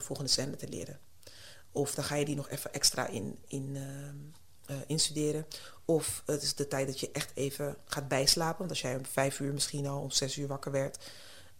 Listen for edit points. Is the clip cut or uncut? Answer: uncut